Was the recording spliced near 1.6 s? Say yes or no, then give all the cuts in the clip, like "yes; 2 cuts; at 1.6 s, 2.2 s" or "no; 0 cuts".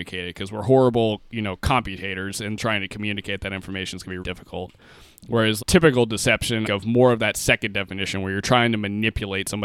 no; 3 cuts; at 4.2 s, 5.6 s, 6.6 s